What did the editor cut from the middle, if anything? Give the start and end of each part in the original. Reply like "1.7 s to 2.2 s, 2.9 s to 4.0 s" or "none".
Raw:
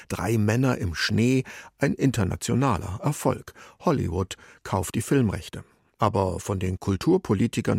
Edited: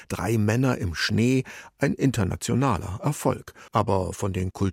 3.7 s to 5.9 s